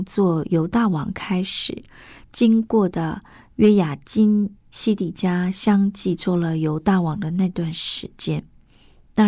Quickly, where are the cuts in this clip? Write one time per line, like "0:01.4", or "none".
0:04.6